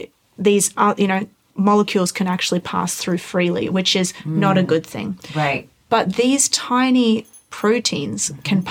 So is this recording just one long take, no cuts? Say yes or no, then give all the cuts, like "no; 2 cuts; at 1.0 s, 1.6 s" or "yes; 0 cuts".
yes; 0 cuts